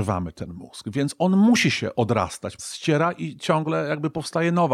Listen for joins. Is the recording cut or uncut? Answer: cut